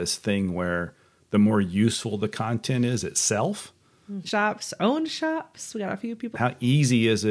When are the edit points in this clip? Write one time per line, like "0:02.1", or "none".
0:04.3
0:06.3